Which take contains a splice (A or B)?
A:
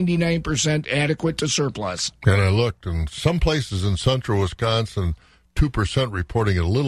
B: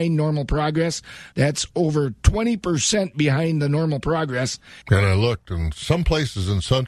B